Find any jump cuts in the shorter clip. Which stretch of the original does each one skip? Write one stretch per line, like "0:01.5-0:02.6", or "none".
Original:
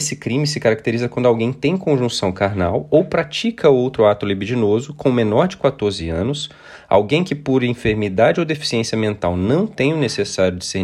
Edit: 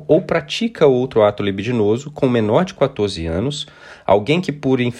none